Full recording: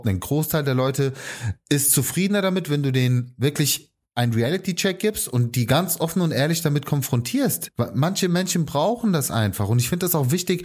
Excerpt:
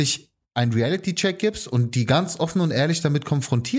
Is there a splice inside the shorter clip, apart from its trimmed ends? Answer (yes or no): no